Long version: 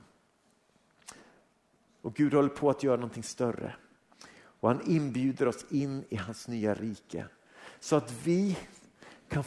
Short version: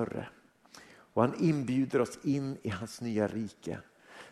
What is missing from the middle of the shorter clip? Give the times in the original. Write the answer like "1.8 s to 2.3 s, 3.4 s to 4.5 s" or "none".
none